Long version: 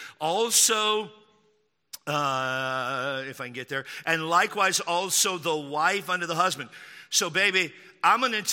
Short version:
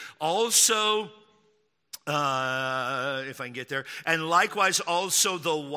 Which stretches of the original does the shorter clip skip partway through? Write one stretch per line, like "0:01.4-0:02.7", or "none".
none